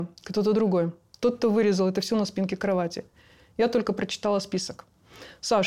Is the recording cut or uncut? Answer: uncut